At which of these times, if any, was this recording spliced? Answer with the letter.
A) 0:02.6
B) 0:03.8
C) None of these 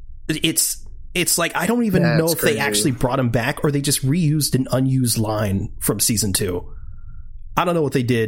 C